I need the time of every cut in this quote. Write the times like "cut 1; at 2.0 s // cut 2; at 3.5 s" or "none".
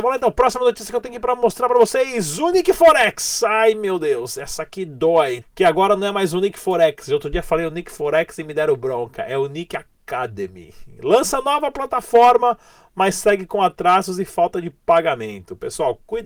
cut 1; at 5.4 s // cut 2; at 11.0 s